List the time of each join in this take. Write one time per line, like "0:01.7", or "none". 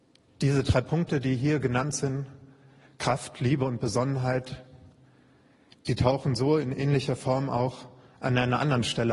none